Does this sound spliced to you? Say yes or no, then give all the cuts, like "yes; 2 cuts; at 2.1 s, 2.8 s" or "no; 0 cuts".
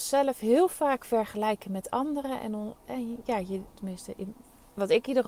yes; 1 cut; at 3.7 s